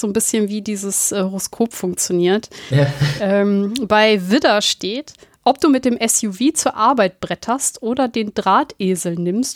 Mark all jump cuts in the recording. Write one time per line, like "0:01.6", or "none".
none